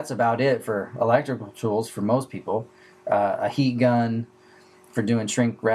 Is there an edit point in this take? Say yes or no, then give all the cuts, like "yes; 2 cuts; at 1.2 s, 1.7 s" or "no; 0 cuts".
no; 0 cuts